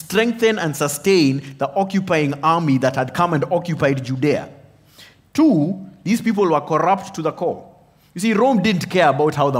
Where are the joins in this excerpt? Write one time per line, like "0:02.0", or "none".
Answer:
none